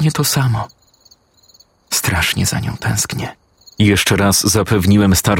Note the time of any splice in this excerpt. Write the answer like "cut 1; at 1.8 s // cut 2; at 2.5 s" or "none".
cut 1; at 3.6 s